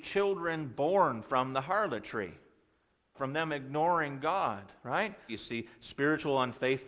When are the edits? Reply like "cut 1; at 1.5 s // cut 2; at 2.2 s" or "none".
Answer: cut 1; at 3.1 s // cut 2; at 5.3 s